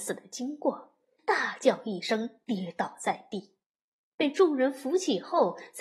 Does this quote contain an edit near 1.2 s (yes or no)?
yes